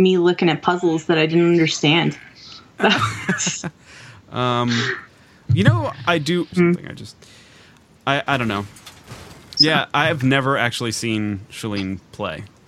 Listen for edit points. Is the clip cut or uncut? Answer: cut